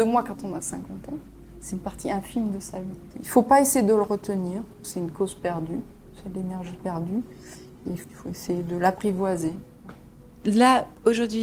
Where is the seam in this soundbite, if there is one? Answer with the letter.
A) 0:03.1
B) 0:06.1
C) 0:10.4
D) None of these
A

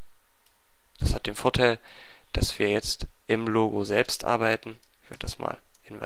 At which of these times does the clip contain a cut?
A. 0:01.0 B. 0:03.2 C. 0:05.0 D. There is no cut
A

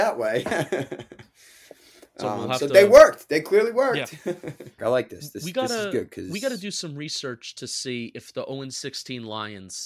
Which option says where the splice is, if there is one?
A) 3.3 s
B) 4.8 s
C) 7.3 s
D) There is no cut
B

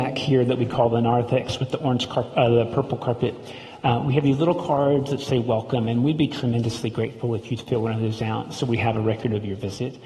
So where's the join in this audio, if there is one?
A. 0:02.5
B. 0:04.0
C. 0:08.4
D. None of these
D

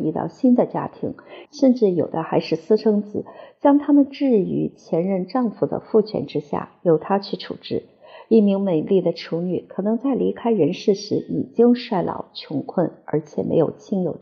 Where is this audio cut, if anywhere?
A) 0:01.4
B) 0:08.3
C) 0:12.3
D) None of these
A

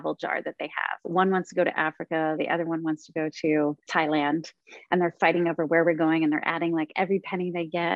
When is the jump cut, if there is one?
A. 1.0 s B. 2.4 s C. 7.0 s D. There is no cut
A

